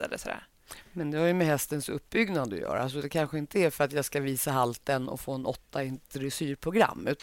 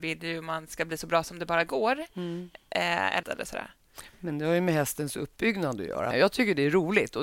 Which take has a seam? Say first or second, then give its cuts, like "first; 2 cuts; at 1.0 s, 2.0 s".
second; 2 cuts; at 3.2 s, 6.1 s